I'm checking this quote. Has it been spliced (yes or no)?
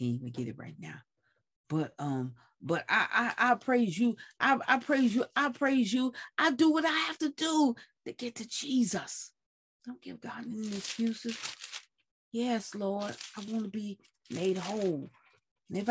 yes